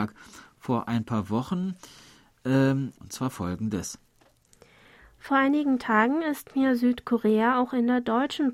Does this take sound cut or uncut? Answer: cut